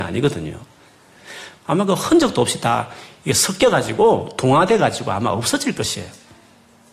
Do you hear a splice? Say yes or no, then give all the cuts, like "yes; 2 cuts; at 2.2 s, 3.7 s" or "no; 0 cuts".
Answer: yes; 1 cut; at 1.6 s